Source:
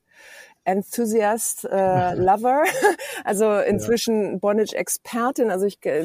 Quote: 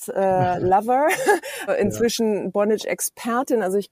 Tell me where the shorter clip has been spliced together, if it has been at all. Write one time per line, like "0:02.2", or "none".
0:01.7